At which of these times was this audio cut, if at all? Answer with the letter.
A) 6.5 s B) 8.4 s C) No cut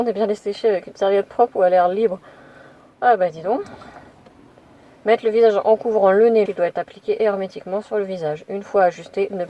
A